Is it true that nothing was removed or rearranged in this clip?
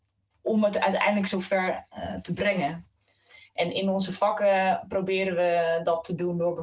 yes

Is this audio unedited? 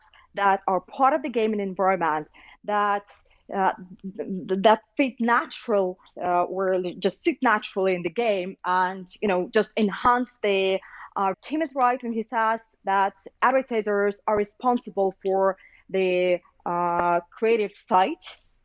no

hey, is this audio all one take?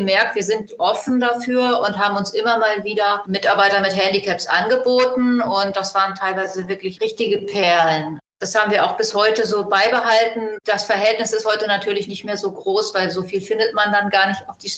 yes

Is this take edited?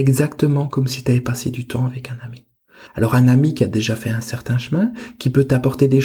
no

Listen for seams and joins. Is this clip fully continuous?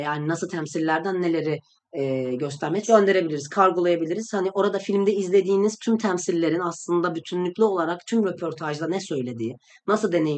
no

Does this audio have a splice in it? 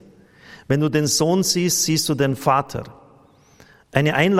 no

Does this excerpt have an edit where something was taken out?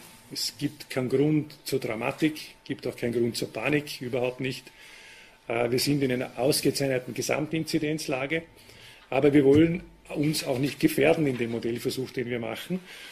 no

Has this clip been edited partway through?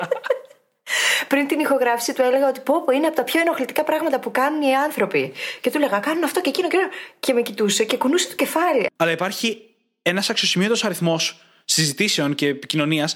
yes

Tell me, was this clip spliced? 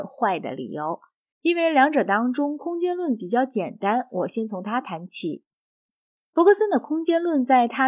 yes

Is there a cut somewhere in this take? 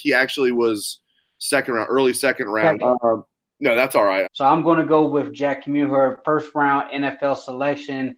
yes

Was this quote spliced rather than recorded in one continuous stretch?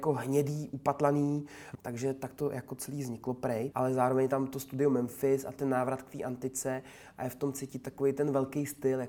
yes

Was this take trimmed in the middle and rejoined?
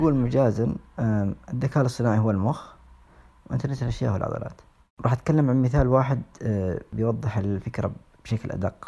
no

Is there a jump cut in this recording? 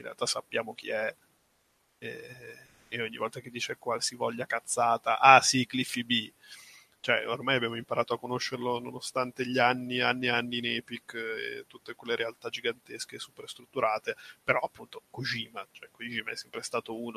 no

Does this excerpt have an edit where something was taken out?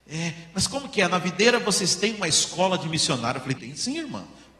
yes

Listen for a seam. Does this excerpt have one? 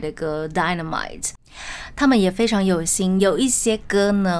no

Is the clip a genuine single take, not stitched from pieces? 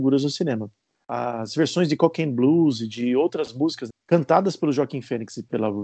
no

